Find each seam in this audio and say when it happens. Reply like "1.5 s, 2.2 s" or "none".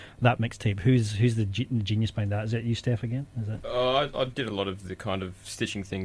none